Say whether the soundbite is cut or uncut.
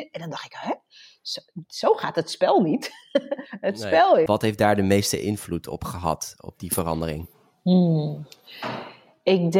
cut